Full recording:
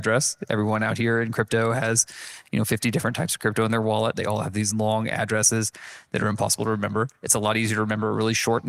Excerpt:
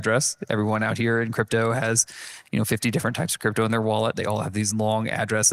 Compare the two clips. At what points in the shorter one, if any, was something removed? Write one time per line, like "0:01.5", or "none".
none